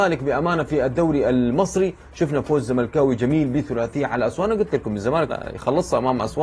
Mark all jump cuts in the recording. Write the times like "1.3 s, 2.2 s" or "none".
5.3 s